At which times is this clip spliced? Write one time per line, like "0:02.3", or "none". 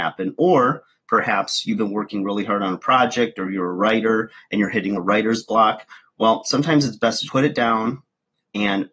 0:04.9
0:07.3